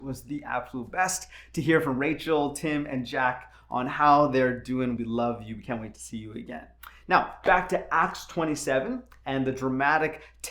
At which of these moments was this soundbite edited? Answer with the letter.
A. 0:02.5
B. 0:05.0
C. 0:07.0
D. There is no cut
B